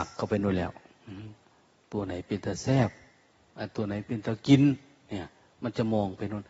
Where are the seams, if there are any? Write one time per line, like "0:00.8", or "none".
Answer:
none